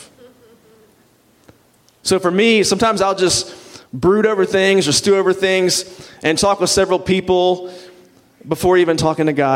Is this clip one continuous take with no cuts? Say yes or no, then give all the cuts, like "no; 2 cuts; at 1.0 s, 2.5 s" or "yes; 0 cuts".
yes; 0 cuts